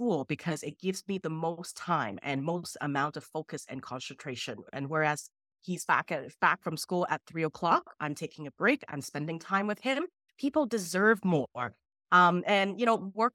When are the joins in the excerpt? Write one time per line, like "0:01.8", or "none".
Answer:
0:10.3

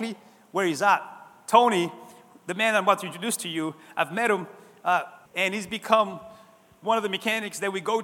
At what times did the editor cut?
0:05.3

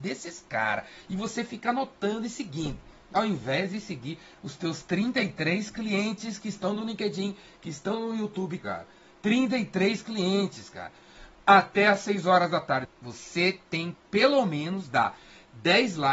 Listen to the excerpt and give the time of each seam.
0:08.6
0:12.8
0:13.9

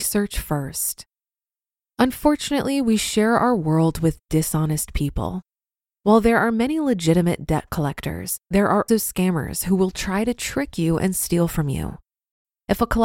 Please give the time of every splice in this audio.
0:08.9

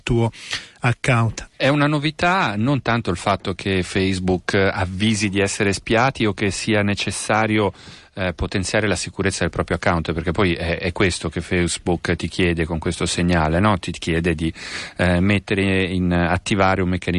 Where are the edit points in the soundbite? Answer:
0:01.5

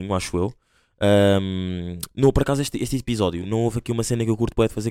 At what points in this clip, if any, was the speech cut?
none

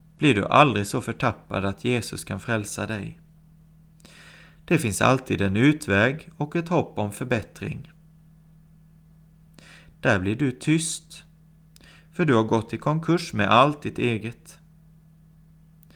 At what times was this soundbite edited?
0:09.9

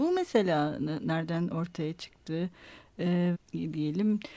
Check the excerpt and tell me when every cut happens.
0:03.3

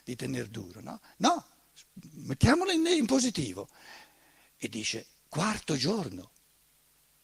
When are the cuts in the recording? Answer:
none

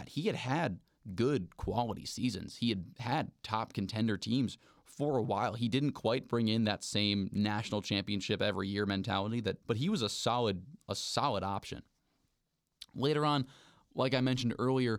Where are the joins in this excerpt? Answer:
0:09.6

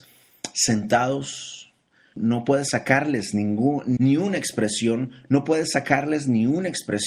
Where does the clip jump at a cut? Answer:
0:02.1
0:04.0

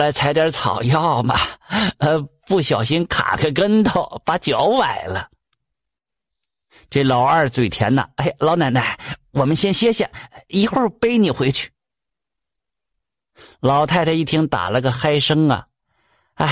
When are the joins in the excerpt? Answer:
none

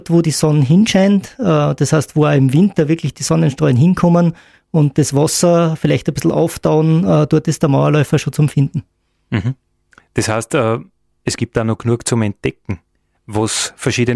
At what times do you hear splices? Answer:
none

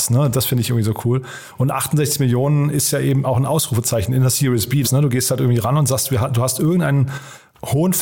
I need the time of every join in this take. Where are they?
0:04.8

